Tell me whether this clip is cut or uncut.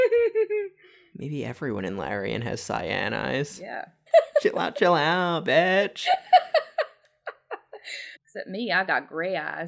cut